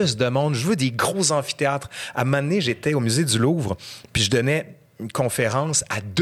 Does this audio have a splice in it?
no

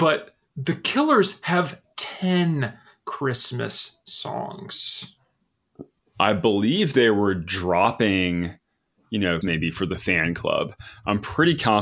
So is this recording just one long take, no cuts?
no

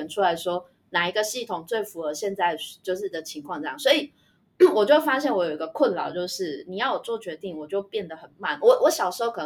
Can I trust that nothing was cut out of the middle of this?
yes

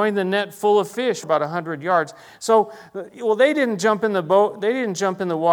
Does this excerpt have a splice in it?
yes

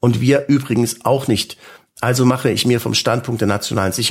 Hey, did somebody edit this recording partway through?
no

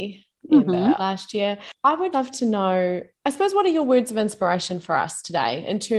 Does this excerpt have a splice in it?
yes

